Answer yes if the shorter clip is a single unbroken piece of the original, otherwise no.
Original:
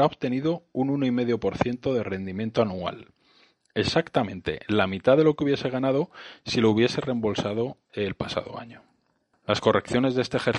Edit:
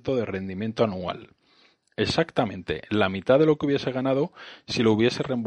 yes